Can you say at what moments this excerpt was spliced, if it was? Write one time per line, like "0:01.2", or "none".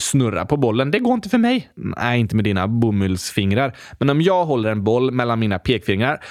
none